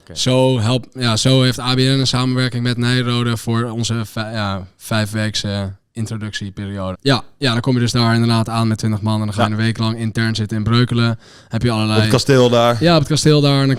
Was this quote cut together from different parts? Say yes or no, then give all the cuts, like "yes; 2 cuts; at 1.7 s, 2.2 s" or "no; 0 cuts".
yes; 1 cut; at 6.9 s